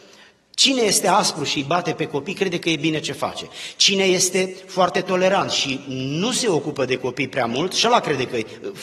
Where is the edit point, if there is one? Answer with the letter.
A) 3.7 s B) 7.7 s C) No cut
C